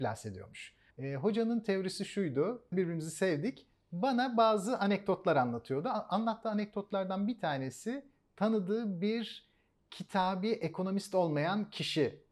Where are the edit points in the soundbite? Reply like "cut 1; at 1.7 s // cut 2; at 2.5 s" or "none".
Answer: cut 1; at 0.9 s // cut 2; at 2.7 s